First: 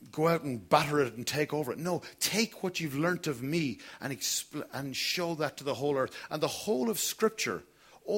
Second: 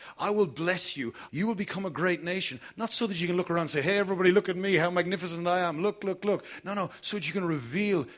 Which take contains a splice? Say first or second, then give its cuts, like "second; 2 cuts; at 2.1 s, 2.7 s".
second; 1 cut; at 1.3 s